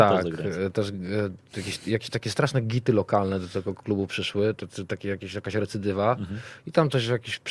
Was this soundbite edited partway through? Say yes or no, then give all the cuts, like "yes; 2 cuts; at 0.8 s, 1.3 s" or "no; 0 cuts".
no; 0 cuts